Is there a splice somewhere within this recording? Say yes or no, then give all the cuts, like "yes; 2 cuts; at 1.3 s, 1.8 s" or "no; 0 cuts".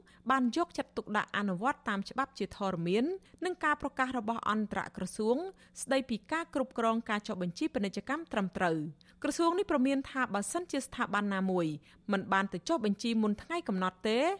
no; 0 cuts